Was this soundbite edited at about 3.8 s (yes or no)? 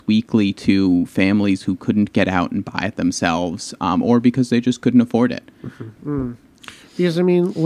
no